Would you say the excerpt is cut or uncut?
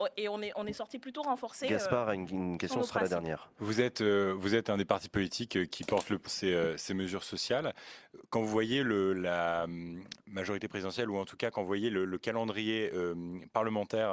cut